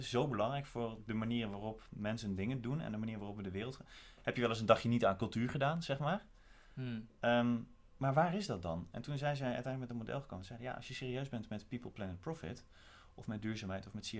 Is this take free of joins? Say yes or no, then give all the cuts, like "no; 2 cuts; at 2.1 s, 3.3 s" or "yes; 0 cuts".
yes; 0 cuts